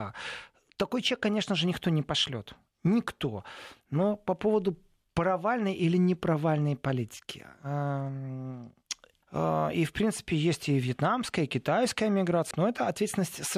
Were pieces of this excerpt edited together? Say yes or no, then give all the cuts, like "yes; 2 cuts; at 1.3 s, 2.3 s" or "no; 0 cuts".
yes; 2 cuts; at 9.2 s, 12.5 s